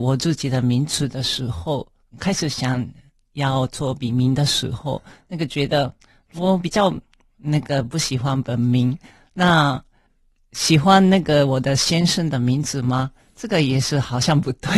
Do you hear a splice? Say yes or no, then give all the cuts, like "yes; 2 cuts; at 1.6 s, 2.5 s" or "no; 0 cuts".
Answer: no; 0 cuts